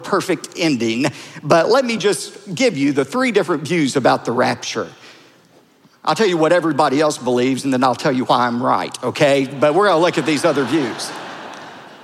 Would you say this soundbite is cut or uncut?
uncut